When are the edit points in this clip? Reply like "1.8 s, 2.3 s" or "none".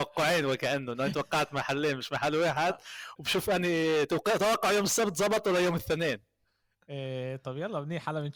none

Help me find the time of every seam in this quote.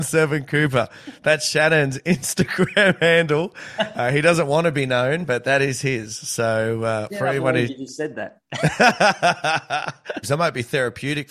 10.2 s

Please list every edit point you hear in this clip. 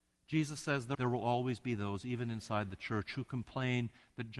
0.9 s

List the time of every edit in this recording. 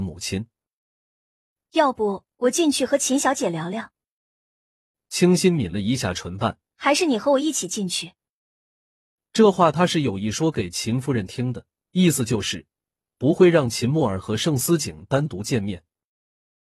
6.7 s

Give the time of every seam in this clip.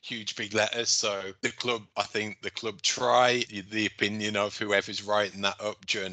3.5 s

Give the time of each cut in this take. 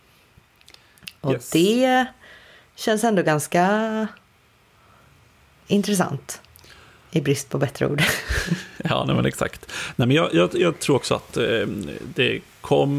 none

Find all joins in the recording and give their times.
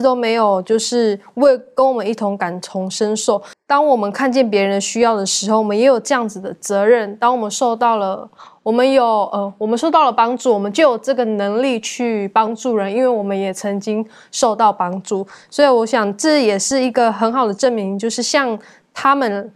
3.5 s

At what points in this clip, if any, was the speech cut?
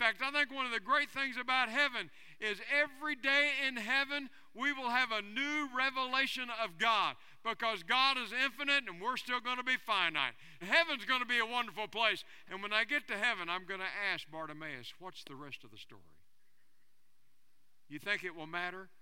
10.6 s, 12.5 s

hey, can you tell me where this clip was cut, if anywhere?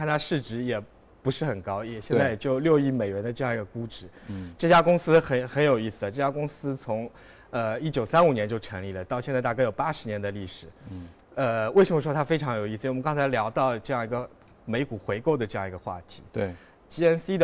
none

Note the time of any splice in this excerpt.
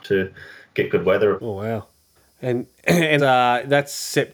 1.4 s, 3.2 s

